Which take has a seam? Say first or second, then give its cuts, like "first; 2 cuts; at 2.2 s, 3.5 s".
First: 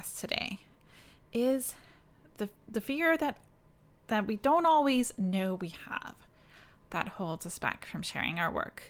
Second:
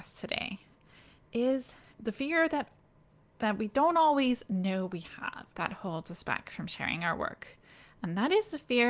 second; 2 cuts; at 1.9 s, 5.5 s